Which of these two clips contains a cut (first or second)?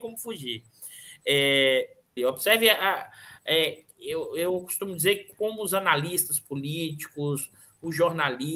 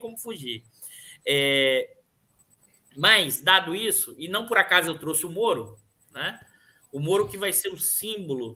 first